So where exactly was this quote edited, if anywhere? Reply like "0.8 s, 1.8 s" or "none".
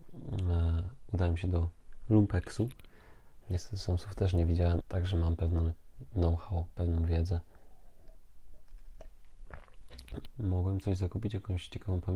3.4 s, 4.8 s, 10.3 s